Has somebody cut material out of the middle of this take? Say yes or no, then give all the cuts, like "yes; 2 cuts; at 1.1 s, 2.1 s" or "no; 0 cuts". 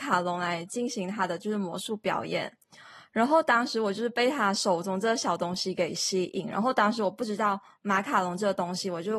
no; 0 cuts